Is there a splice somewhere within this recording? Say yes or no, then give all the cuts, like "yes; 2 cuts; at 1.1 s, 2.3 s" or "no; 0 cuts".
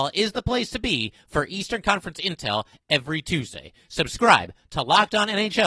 no; 0 cuts